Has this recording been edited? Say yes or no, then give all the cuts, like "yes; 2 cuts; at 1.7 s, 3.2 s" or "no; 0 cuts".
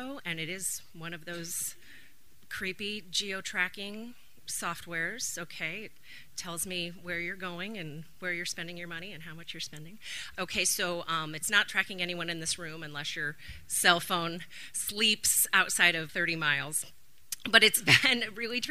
yes; 2 cuts; at 10.3 s, 16.1 s